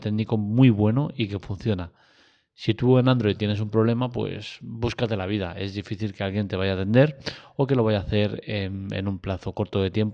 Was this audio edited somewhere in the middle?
no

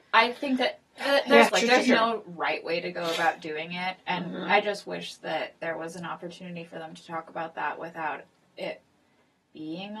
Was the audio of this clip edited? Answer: yes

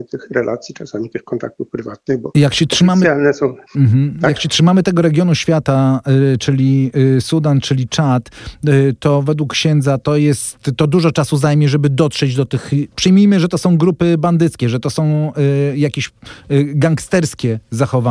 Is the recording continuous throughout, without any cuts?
no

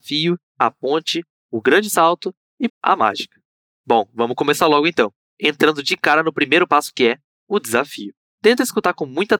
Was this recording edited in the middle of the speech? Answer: yes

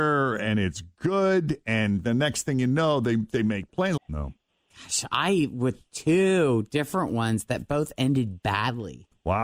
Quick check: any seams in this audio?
yes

